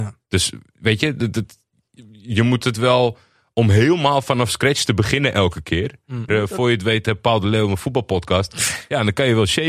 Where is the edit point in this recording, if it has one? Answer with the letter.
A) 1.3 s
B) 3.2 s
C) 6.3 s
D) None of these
C